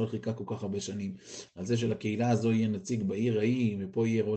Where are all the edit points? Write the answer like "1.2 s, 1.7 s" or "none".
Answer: 1.5 s